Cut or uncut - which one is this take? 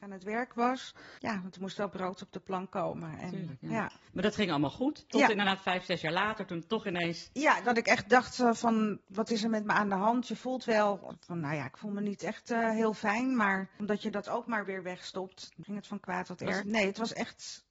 cut